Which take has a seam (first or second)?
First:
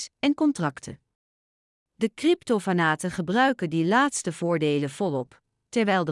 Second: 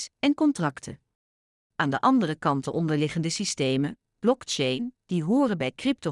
second